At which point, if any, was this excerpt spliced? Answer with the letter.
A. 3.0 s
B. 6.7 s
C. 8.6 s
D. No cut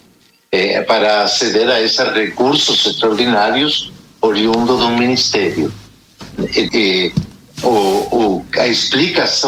B